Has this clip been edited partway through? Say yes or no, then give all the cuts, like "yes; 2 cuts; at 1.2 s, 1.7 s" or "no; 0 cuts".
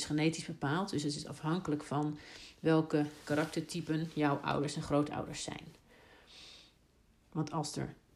yes; 1 cut; at 7.2 s